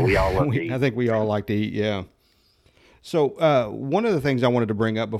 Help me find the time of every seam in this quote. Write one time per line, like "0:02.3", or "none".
none